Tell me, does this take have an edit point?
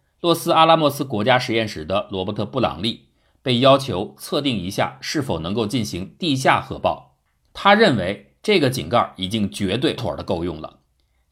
yes; 2 cuts; at 7.5 s, 10.0 s

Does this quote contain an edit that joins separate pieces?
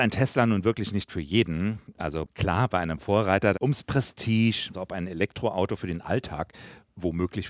yes; 2 cuts; at 3.5 s, 4.7 s

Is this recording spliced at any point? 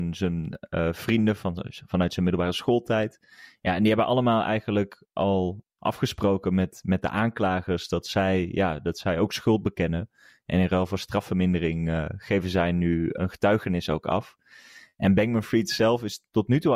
no; 0 cuts

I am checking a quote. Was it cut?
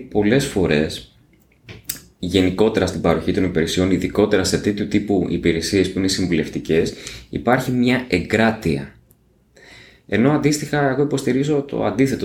no; 0 cuts

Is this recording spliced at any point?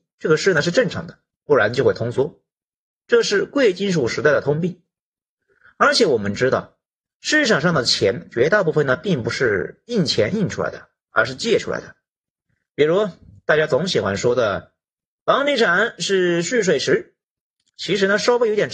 no; 0 cuts

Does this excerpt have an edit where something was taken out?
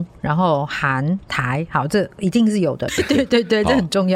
yes; 1 cut; at 2.9 s

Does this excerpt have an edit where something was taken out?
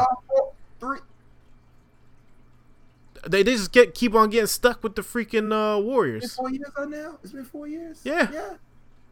no; 0 cuts

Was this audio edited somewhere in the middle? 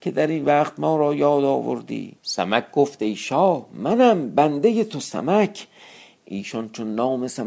yes; 1 cut; at 2.2 s

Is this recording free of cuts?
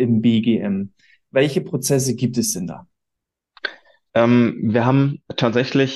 yes; 0 cuts

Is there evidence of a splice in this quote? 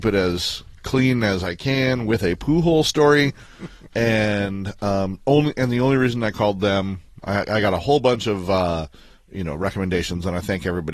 yes; 1 cut; at 3.9 s

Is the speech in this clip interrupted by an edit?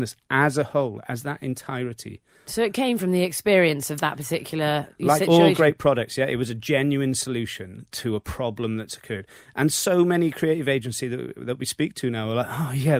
no; 0 cuts

